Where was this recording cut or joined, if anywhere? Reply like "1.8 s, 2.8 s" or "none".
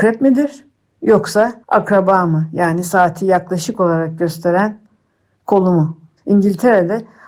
1.6 s, 6.2 s